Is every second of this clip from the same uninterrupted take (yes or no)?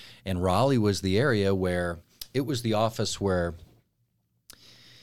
yes